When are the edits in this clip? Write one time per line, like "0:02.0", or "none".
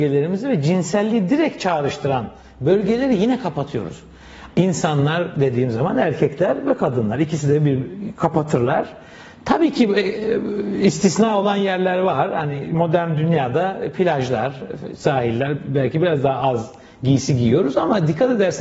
0:04.5